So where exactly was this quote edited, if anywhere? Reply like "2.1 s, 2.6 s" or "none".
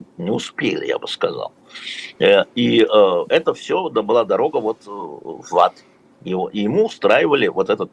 none